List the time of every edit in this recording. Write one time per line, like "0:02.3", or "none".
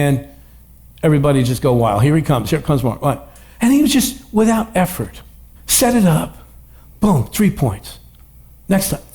0:05.6

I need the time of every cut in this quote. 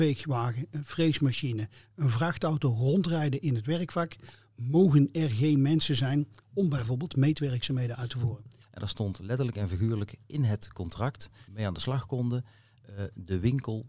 0:08.6
0:11.5

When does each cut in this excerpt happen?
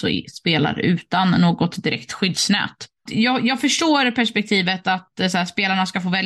0:03.1

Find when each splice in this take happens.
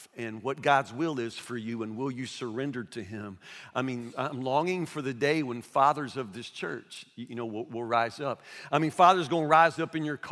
0:04.1

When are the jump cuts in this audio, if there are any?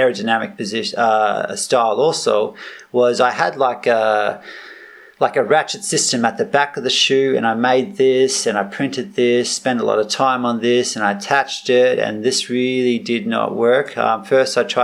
none

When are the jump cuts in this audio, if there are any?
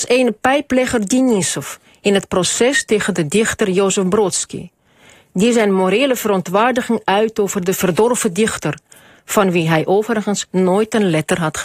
none

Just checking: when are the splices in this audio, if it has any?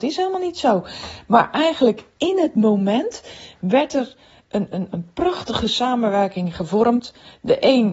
none

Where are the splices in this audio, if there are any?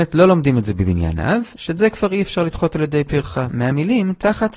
0:01.6
0:03.5

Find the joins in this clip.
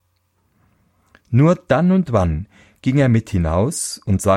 none

